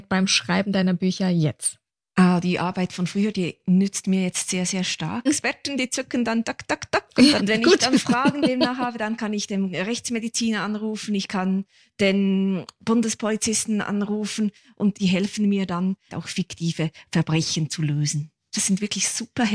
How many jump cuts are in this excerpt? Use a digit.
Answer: 3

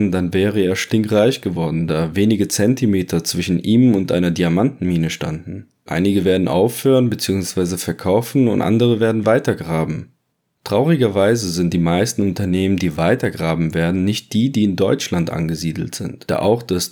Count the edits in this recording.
1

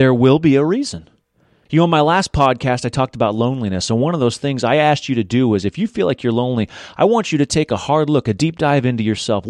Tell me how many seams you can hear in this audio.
1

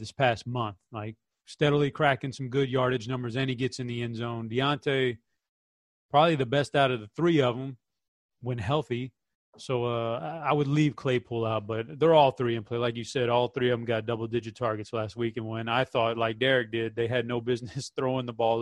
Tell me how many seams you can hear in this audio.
0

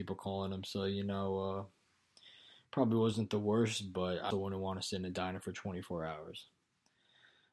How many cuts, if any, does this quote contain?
1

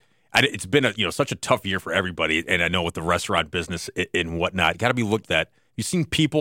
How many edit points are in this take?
1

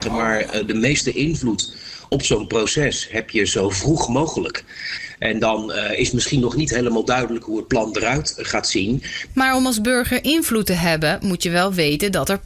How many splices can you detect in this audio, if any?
1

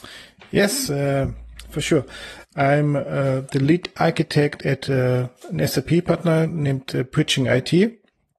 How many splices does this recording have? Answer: 1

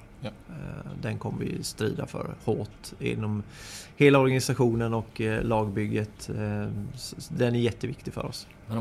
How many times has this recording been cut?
0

